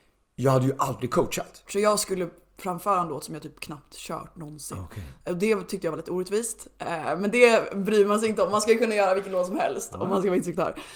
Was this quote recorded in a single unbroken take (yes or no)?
no